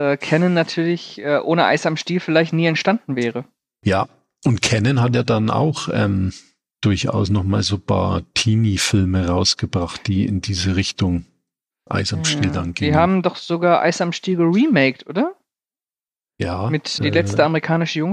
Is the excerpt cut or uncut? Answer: cut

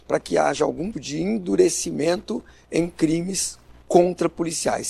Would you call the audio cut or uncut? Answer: cut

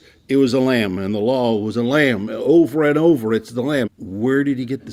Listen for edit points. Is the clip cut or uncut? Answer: cut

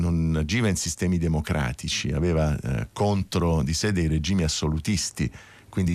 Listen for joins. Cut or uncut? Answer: uncut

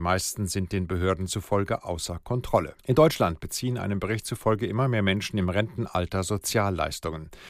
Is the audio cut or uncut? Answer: cut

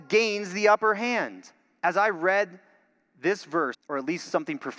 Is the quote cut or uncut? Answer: cut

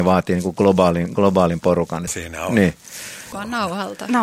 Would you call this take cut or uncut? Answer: cut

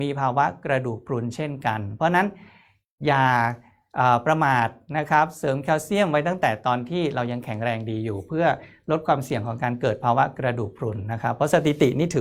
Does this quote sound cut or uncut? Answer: uncut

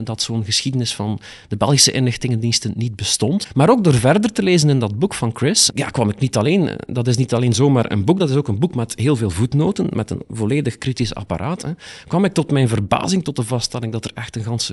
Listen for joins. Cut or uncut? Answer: uncut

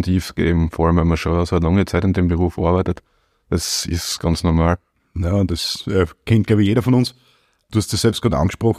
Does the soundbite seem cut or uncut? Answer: uncut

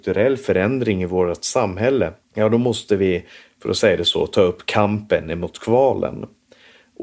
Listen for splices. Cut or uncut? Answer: cut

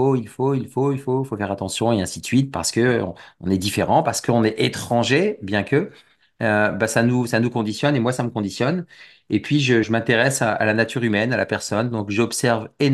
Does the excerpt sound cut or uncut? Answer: cut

